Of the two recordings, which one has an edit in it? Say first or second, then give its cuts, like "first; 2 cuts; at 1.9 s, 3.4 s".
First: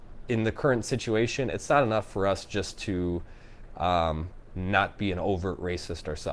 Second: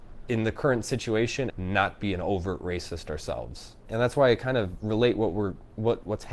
second; 2 cuts; at 1.5 s, 3.9 s